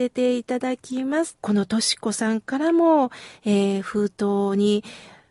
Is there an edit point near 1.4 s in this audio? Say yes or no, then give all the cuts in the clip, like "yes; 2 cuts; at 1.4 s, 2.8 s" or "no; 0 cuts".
yes; 1 cut; at 1.4 s